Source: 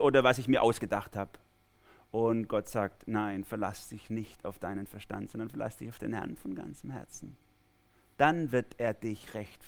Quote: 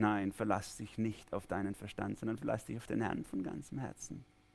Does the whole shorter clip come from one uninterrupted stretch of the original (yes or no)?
yes